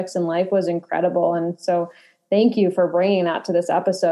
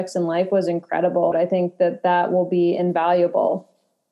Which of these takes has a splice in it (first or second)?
second